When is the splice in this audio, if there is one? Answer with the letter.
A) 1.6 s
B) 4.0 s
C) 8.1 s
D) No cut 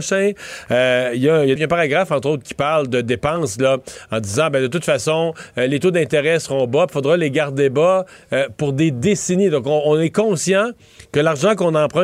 A